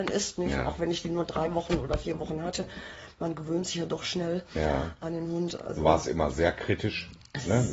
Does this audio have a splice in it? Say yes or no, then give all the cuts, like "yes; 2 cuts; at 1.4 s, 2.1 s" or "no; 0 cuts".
no; 0 cuts